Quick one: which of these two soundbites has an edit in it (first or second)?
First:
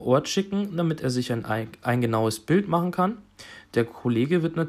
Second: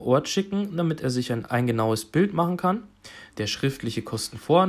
second